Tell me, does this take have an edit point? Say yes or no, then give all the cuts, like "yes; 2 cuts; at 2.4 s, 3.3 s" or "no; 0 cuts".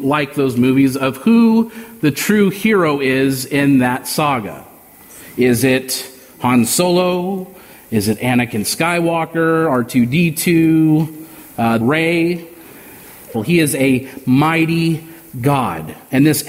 yes; 2 cuts; at 11.8 s, 13.3 s